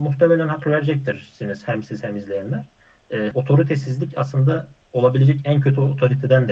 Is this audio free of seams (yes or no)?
no